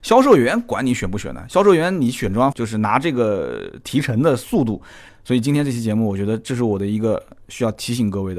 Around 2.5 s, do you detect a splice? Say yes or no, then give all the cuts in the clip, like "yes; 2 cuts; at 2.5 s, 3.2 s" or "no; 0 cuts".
yes; 2 cuts; at 2.5 s, 5.1 s